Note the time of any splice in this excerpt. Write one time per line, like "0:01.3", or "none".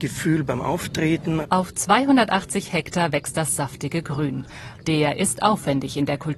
0:01.4
0:04.8

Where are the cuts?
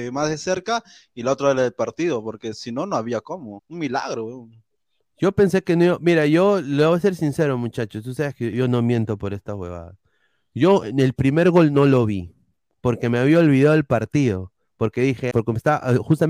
0:03.6
0:08.5
0:15.3

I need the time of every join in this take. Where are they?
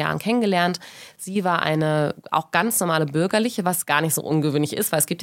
none

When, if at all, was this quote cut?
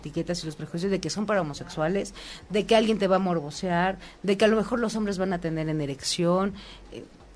0:02.5

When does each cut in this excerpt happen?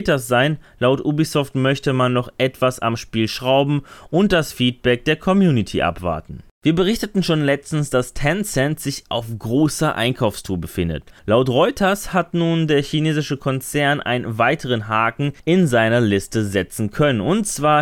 0:06.5

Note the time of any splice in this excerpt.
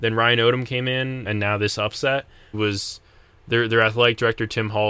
0:01.3
0:02.5

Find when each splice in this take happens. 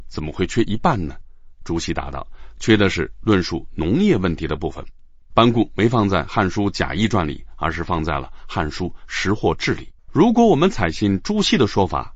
0:10.0

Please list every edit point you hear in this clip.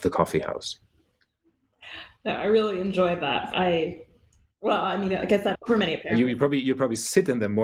0:03.5
0:05.5

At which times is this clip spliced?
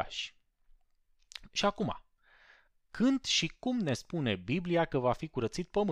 none

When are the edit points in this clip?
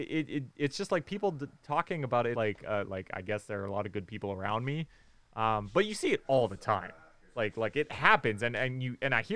0:02.3

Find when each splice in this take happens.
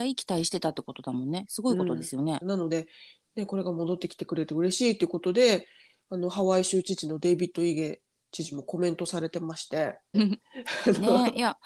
0:02.4
0:10.1

